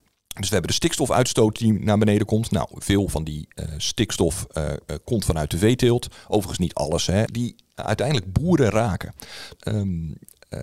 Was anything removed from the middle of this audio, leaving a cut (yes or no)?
yes